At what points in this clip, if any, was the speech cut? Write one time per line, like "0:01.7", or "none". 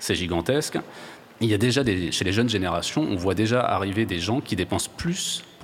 none